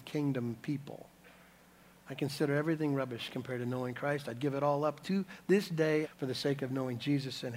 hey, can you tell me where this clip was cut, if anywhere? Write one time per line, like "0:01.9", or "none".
0:05.0
0:06.0